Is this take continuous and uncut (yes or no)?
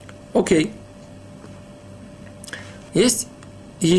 no